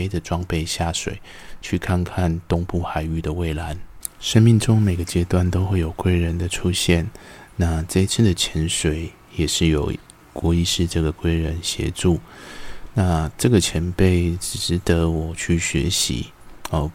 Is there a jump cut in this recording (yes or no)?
no